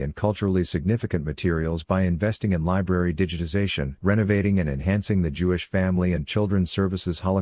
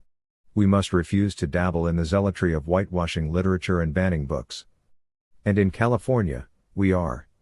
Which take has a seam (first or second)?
first